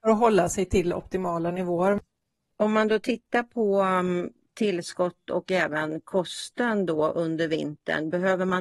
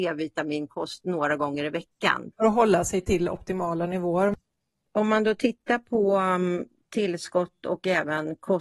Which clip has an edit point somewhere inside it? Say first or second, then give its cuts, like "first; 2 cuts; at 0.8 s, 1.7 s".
second; 1 cut; at 2.3 s